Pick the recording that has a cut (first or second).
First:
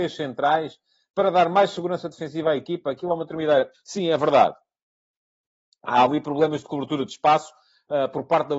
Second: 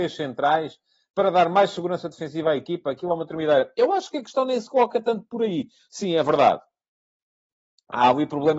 first